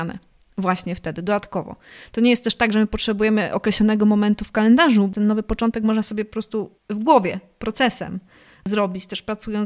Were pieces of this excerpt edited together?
yes; 1 cut; at 6.8 s

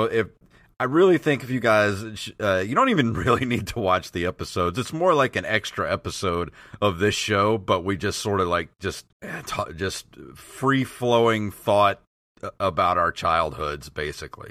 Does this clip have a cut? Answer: yes; 1 cut; at 9.1 s

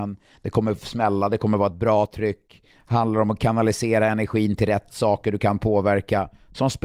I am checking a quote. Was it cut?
no; 0 cuts

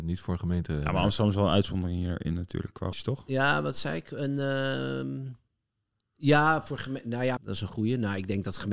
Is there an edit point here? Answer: yes; 2 cuts; at 2.9 s, 7.4 s

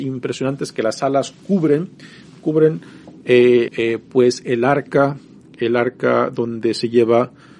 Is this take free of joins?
no; 1 cut; at 3.7 s

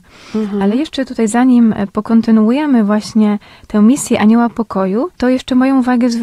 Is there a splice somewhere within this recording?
yes; 1 cut; at 5.1 s

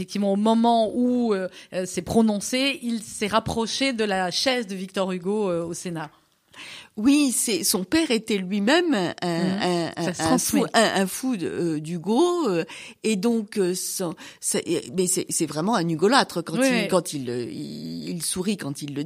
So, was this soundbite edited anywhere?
no; 0 cuts

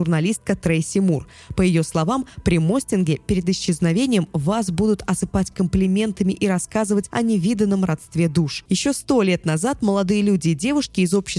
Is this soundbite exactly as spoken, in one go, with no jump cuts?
no; 1 cut; at 8.7 s

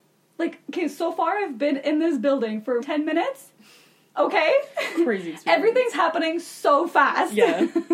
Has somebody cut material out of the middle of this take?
yes; 1 cut; at 2.8 s

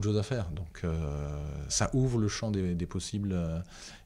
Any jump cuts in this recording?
yes; 1 cut; at 1.7 s

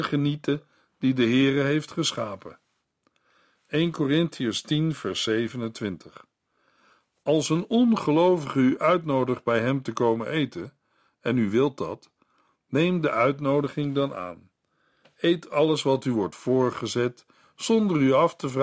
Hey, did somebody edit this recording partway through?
no; 0 cuts

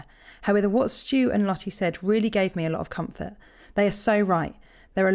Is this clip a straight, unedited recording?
yes; 0 cuts

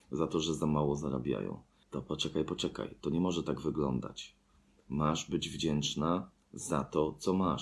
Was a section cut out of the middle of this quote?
no; 0 cuts

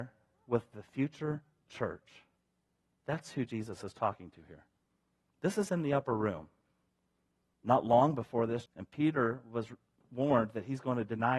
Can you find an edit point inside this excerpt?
yes; 3 cuts; at 5.3 s, 7.5 s, 8.7 s

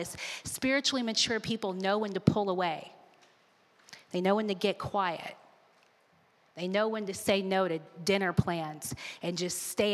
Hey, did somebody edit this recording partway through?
no; 0 cuts

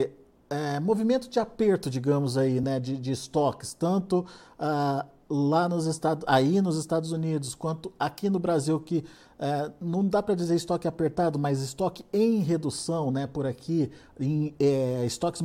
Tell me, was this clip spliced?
no; 0 cuts

